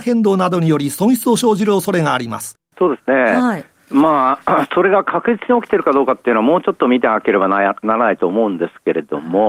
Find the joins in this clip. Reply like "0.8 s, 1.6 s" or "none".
2.7 s